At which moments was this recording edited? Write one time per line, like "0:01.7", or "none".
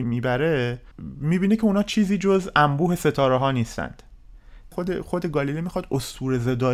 none